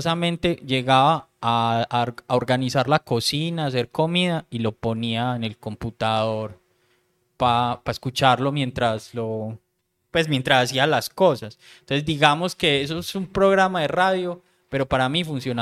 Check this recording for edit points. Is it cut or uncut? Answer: uncut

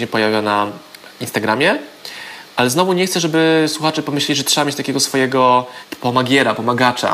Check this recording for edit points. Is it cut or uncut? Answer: uncut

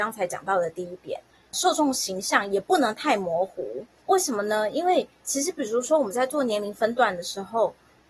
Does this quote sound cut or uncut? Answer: uncut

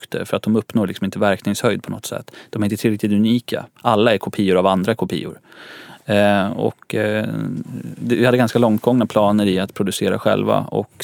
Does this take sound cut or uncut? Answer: uncut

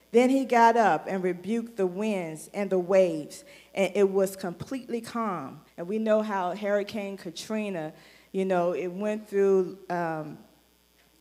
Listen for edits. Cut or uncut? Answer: cut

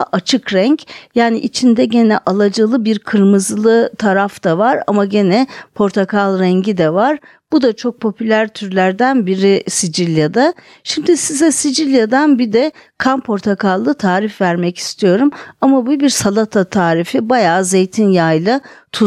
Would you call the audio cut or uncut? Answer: uncut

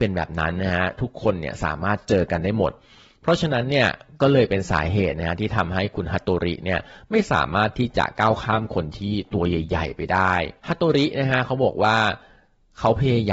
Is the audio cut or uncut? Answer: cut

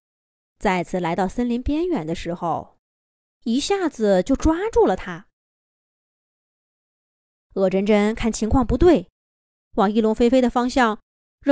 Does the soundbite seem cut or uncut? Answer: cut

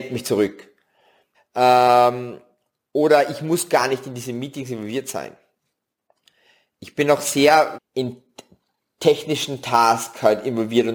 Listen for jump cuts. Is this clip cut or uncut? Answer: cut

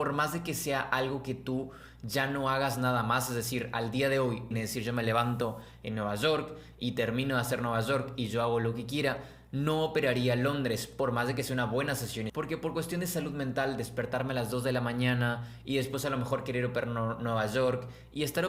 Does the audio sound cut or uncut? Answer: cut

